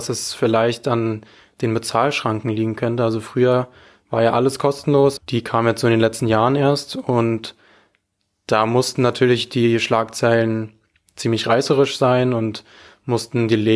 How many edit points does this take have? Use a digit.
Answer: 1